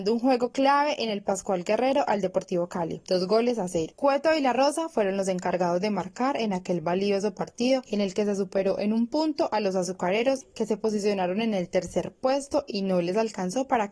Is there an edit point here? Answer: no; 0 cuts

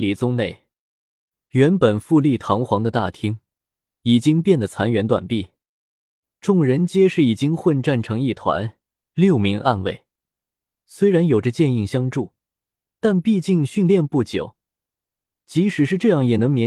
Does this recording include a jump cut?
no; 0 cuts

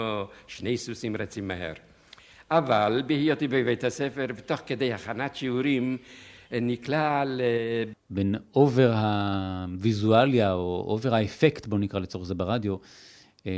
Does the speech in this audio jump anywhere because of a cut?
yes; 1 cut; at 7.9 s

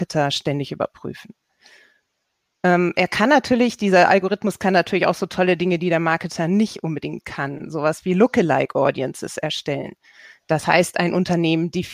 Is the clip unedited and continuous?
yes; 0 cuts

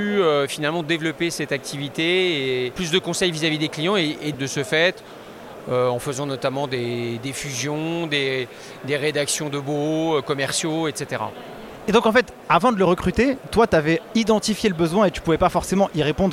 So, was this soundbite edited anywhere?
yes; 1 cut; at 4.3 s

